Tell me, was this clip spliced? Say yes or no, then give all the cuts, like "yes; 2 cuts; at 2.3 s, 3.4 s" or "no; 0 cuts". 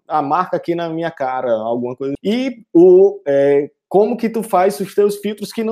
yes; 1 cut; at 2.2 s